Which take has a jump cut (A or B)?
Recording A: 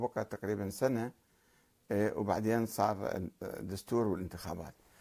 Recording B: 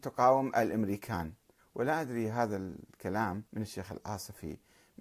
B